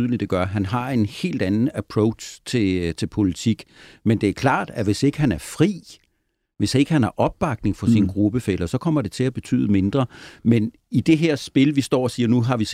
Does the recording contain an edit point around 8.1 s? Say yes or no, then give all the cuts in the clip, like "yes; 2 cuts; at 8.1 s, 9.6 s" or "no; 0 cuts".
no; 0 cuts